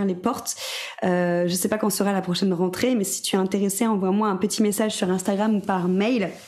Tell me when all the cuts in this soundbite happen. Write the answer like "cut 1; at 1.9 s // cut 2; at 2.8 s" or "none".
none